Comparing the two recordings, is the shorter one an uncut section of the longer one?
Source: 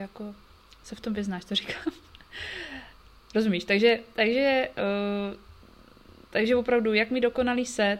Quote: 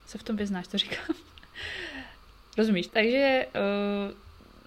no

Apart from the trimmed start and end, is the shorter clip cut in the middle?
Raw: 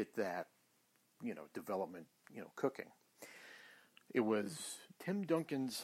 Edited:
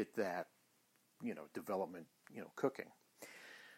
no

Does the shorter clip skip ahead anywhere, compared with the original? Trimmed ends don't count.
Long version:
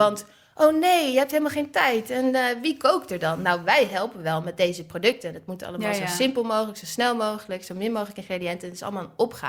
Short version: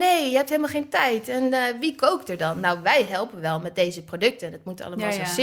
no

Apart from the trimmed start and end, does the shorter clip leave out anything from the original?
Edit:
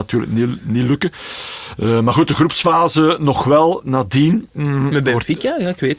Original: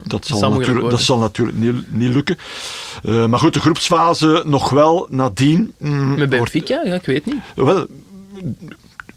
no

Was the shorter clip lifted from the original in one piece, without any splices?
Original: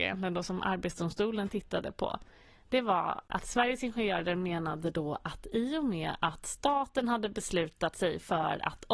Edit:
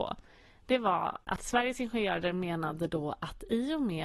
yes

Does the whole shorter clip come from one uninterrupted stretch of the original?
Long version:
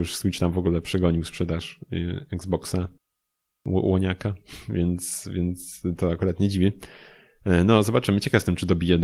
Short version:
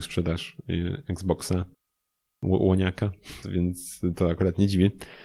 no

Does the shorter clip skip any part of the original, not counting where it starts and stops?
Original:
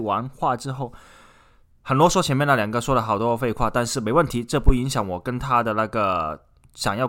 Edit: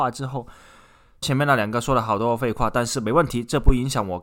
yes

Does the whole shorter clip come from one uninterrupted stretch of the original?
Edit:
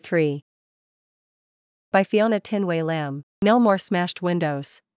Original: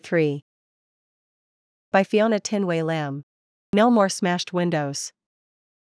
no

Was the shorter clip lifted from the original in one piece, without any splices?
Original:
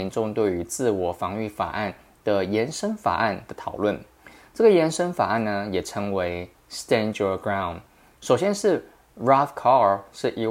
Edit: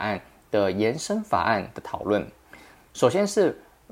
no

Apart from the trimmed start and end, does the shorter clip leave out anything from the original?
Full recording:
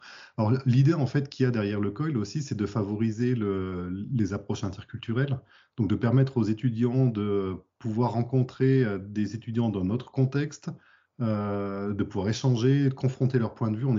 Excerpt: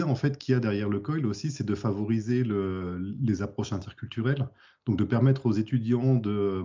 no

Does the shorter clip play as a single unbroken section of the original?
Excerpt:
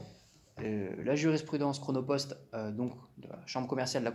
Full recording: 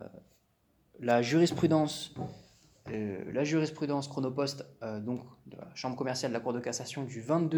yes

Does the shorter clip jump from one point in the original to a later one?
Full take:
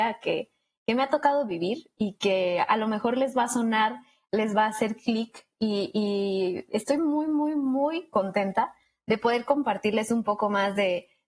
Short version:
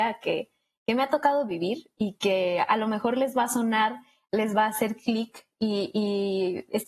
no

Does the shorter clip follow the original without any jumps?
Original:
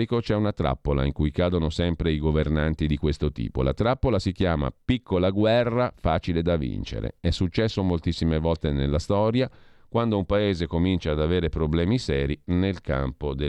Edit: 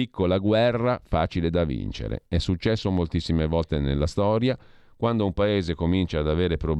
yes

